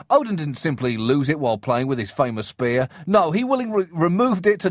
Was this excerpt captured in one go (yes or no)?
yes